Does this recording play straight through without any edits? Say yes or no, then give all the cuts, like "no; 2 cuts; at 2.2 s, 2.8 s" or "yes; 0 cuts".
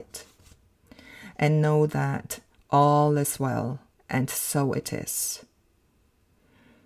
no; 1 cut; at 3.9 s